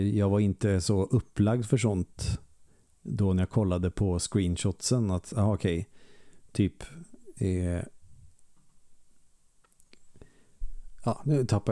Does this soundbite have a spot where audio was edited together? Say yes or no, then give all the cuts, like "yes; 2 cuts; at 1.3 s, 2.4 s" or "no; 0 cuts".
no; 0 cuts